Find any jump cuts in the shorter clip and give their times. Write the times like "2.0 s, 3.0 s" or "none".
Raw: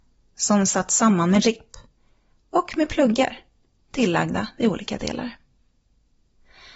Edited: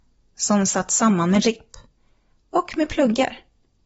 none